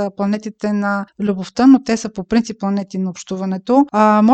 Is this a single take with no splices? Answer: yes; 0 cuts

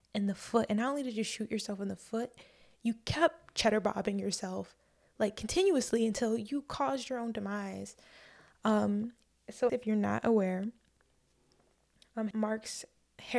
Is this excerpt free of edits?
no; 2 cuts; at 9.7 s, 12.3 s

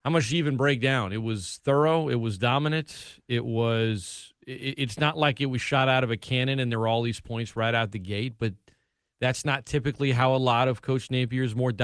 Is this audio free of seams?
yes; 0 cuts

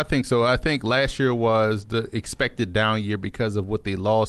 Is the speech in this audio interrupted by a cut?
no; 0 cuts

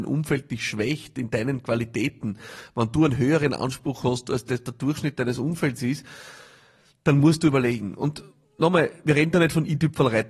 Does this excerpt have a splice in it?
no; 0 cuts

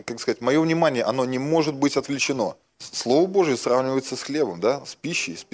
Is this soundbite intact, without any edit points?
no; 1 cut; at 2.7 s

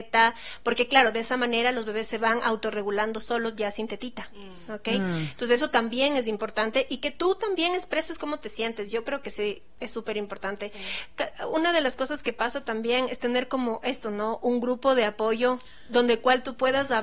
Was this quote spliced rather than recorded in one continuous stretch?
no; 0 cuts

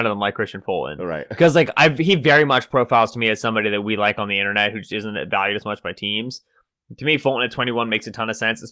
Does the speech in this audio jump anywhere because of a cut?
no; 0 cuts

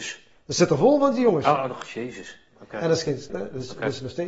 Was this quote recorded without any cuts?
no; 1 cut; at 3.3 s

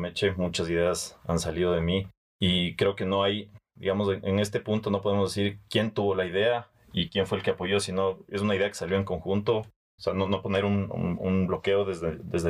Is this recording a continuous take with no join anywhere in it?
no; 1 cut; at 10.0 s

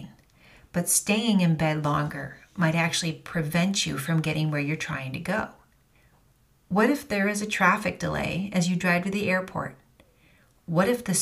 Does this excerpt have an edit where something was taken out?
no; 0 cuts

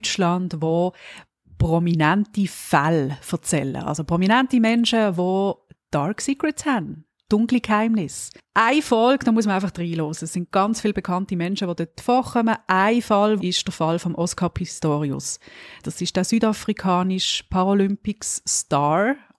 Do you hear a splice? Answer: yes; 2 cuts; at 13.4 s, 15.8 s

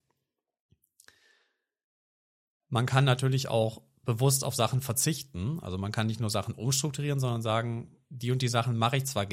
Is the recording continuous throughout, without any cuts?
no; 1 cut; at 8.0 s

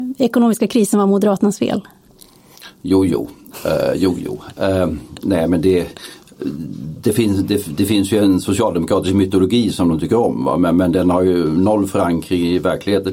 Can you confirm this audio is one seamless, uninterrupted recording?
yes; 0 cuts

